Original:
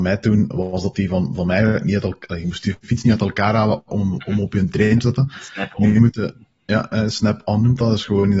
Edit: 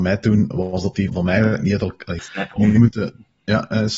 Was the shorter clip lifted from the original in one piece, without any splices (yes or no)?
no